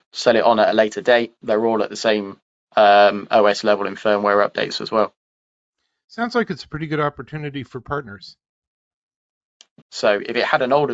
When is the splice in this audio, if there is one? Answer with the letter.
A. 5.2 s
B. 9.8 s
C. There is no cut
B